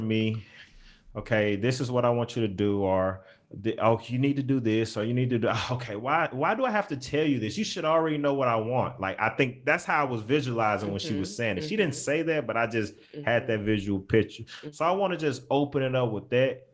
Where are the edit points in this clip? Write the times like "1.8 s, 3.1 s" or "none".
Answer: none